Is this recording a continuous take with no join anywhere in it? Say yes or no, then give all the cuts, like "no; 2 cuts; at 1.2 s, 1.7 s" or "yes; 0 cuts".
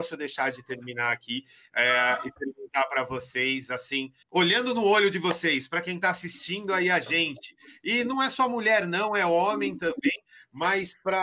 no; 1 cut; at 4.2 s